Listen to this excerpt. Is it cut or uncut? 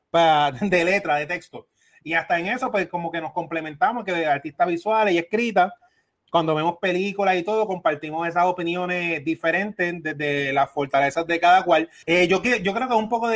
cut